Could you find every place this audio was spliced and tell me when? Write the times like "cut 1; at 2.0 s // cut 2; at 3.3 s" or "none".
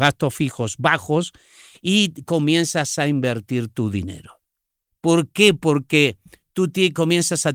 cut 1; at 4.9 s